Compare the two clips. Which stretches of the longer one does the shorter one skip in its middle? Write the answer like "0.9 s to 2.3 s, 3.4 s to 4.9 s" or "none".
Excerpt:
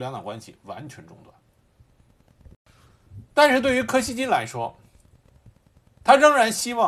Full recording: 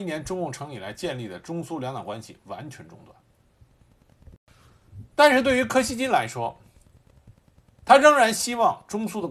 none